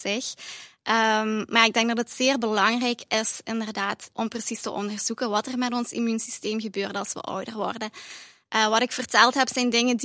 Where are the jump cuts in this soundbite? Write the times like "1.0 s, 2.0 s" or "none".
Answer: 4.1 s